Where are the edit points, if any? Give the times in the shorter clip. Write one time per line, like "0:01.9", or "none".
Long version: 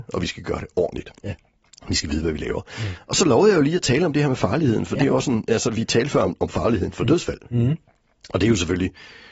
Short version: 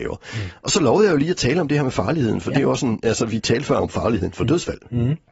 0:03.8